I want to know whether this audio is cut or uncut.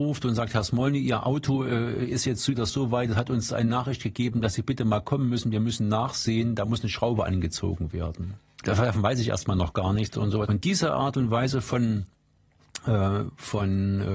cut